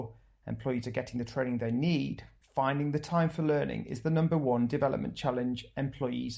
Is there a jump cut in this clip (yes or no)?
yes